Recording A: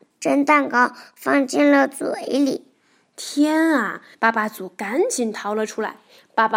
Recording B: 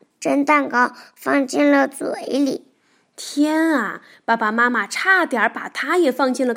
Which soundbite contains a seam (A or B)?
A